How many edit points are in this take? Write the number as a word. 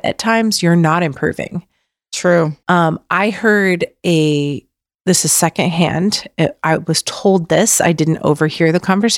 zero